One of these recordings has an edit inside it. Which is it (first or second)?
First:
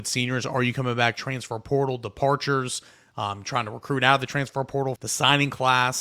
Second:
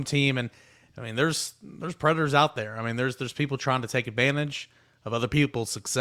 first